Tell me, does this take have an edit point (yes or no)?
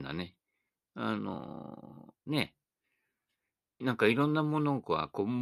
yes